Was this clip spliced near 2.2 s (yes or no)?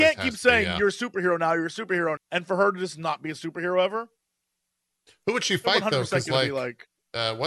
yes